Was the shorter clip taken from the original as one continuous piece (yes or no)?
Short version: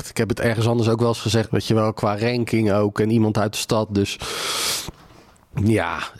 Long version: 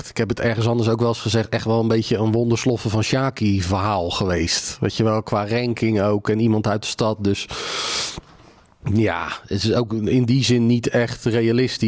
no